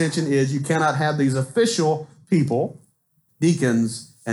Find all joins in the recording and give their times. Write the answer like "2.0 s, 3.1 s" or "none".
3.3 s